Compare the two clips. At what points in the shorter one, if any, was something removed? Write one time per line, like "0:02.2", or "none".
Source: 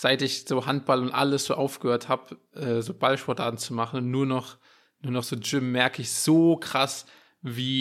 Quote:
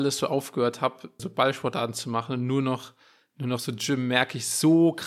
0:01.2